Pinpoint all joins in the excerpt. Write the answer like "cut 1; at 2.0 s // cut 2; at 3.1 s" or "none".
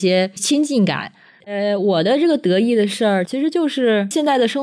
cut 1; at 1.4 s // cut 2; at 3.3 s